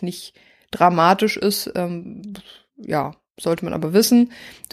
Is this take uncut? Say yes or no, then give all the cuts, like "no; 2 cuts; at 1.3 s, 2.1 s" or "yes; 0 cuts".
yes; 0 cuts